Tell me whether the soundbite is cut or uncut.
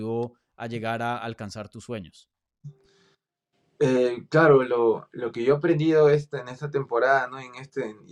uncut